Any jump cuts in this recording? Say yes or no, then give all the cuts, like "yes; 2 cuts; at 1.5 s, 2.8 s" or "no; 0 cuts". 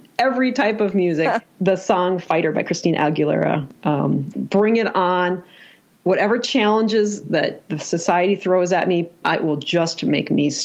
yes; 2 cuts; at 4.3 s, 9.2 s